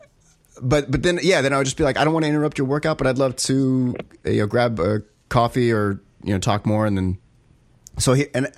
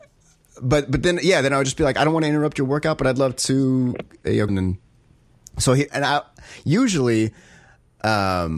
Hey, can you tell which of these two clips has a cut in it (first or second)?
second